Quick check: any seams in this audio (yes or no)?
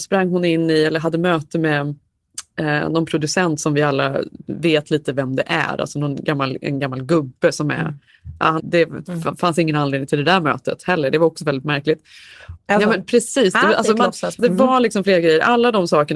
yes